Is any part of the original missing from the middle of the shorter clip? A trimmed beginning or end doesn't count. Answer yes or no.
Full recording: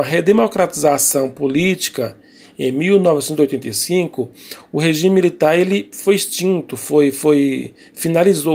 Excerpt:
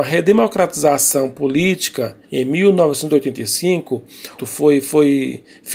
yes